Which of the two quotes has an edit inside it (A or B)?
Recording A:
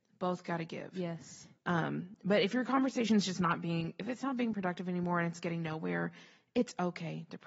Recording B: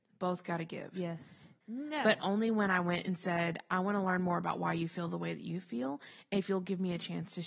B